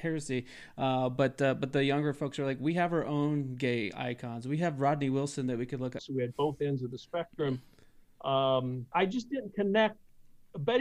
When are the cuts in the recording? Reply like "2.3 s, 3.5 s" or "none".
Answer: 6.0 s, 8.9 s